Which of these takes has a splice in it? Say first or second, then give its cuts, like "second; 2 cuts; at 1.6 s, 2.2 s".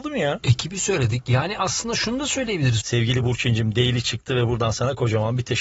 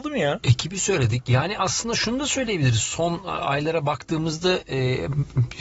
first; 1 cut; at 2.8 s